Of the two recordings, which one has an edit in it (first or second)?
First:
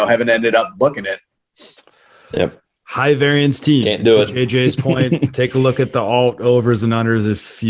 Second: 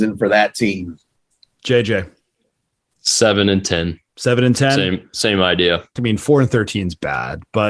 second